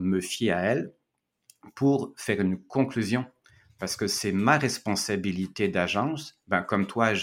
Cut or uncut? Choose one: uncut